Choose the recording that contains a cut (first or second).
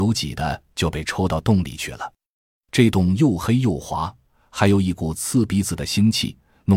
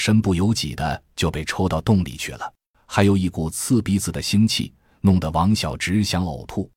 second